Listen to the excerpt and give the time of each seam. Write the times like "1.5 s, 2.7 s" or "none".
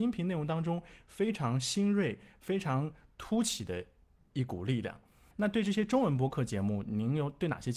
5.3 s